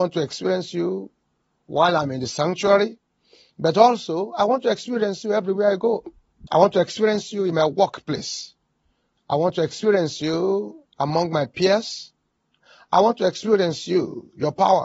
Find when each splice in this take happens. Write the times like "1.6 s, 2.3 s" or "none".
6.5 s